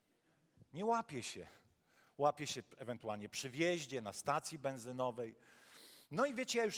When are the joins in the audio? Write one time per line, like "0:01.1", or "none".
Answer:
none